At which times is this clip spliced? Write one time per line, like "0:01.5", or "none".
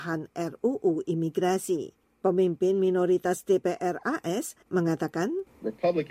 0:04.7